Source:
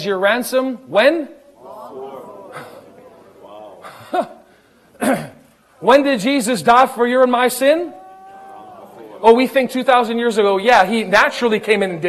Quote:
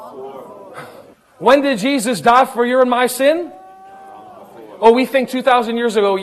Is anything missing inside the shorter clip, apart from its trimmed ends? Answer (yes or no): yes